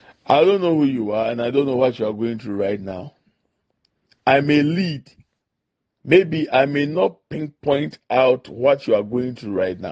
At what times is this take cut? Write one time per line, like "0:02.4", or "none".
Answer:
none